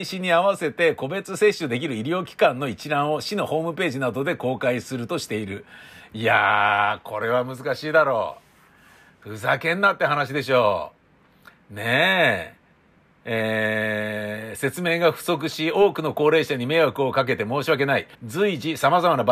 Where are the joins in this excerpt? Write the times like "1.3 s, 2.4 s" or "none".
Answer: 18.1 s